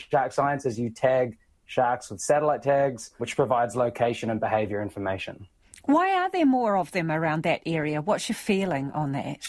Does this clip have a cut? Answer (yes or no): yes